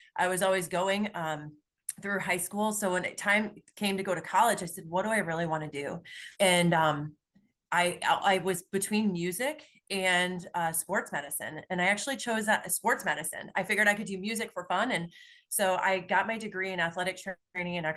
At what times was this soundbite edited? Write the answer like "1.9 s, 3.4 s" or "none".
6.3 s